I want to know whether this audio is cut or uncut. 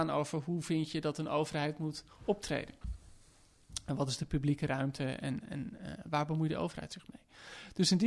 uncut